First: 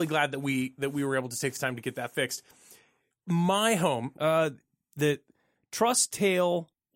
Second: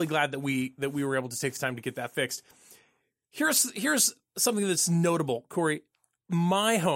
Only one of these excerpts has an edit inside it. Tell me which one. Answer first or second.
first